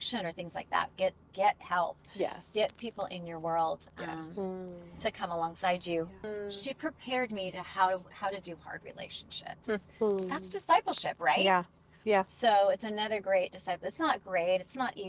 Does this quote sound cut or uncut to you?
cut